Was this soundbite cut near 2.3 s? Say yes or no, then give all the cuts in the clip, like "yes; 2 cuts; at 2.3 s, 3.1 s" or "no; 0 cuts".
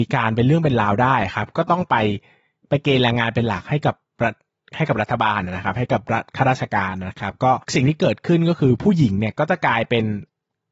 no; 0 cuts